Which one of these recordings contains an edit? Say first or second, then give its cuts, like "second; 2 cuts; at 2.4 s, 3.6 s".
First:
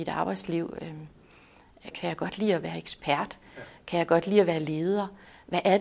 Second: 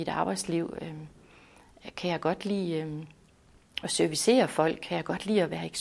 first; 1 cut; at 1.9 s